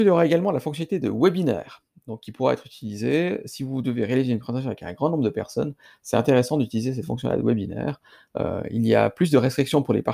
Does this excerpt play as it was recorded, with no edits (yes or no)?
yes